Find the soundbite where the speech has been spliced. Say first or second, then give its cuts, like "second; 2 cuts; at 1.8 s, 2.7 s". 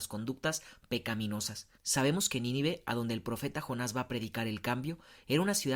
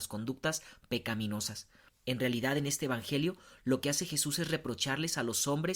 first; 1 cut; at 1.7 s